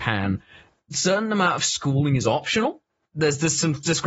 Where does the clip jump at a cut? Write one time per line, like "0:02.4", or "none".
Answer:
0:03.0